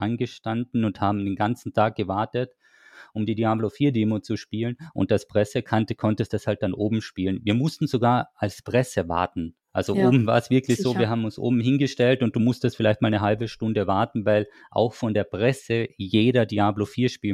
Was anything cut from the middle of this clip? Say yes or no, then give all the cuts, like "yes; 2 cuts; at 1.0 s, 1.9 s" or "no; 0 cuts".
yes; 1 cut; at 9.6 s